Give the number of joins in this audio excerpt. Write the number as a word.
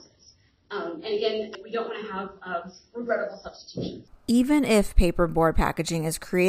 zero